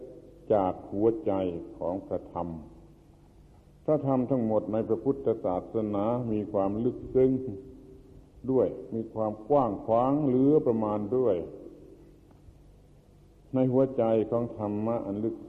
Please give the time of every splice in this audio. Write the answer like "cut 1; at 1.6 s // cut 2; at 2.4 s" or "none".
none

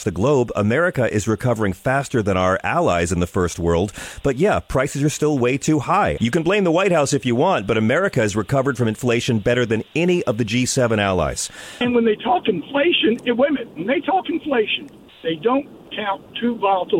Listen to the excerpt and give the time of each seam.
cut 1; at 6.2 s // cut 2; at 11.8 s

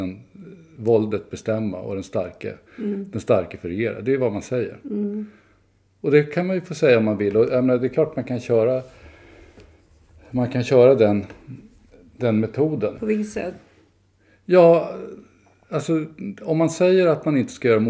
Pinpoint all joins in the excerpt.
cut 1; at 12.9 s

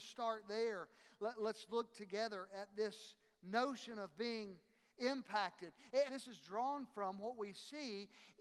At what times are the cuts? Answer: cut 1; at 6.1 s

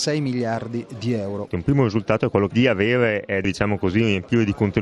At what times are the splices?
cut 1; at 1.5 s // cut 2; at 3.4 s

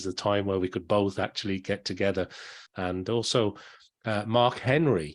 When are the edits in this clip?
cut 1; at 2.7 s

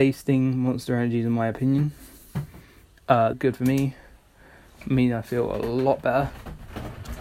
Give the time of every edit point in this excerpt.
cut 1; at 3.3 s

